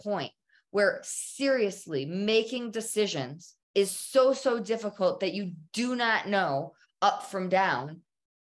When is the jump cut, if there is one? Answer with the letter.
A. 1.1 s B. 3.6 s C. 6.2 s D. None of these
B